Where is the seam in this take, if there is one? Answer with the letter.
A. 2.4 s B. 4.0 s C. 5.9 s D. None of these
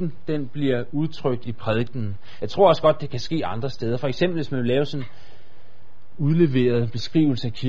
A